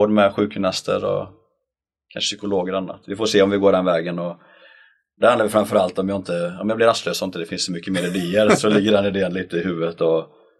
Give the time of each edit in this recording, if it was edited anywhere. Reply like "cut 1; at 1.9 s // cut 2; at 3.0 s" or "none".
cut 1; at 8.6 s